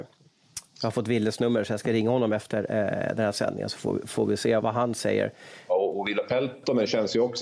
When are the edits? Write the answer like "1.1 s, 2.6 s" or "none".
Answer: 4.6 s, 5.7 s